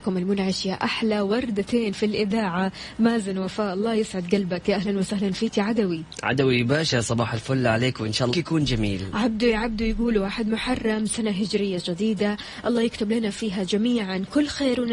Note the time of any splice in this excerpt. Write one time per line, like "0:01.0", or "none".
0:08.3